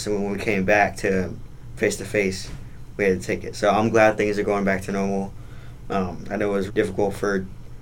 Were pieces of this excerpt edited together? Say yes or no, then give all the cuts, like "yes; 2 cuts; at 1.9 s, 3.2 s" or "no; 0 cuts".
yes; 1 cut; at 6.7 s